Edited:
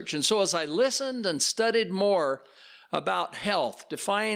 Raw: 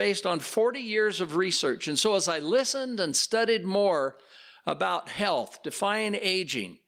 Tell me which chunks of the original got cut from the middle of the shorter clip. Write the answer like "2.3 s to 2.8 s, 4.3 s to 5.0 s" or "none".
none